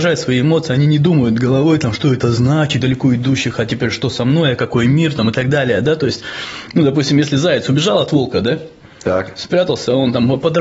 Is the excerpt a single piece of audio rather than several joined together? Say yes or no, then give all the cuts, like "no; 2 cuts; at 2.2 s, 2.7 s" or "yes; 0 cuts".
no; 1 cut; at 2.8 s